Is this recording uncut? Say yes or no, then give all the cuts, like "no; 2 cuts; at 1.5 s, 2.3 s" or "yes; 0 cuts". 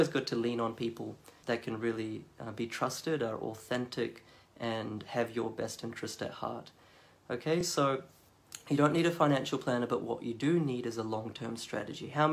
yes; 0 cuts